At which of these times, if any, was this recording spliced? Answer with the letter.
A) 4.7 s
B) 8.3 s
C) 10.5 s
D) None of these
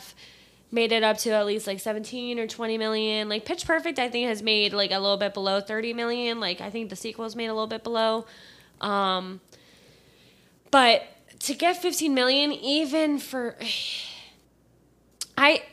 D